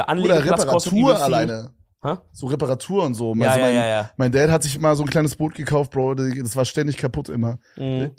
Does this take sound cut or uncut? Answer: uncut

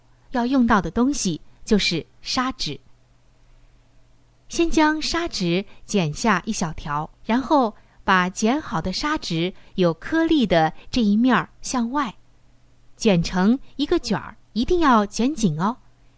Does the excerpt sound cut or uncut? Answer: cut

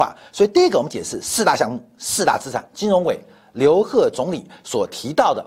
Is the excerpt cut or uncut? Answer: uncut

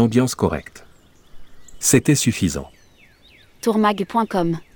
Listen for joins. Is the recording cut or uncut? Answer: uncut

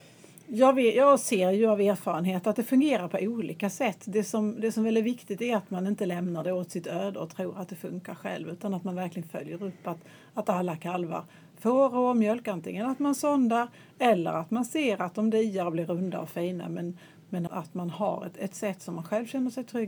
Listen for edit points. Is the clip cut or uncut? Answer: cut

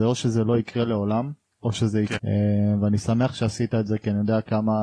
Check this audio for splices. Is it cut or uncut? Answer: cut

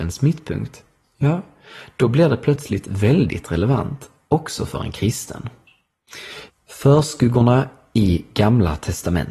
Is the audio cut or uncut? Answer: cut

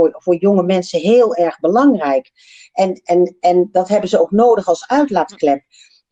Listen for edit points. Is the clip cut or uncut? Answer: uncut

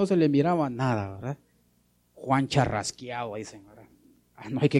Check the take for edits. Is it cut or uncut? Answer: cut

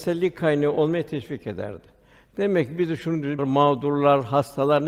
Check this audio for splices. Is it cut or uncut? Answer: cut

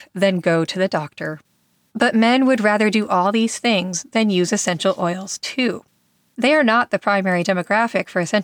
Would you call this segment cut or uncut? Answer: uncut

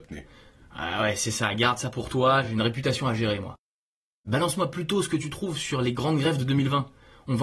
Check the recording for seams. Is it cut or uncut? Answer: uncut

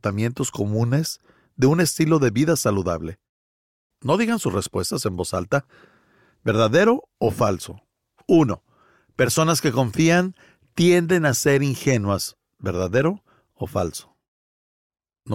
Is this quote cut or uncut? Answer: cut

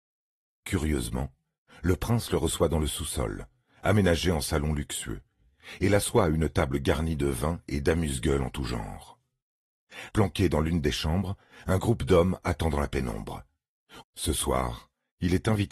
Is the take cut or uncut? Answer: cut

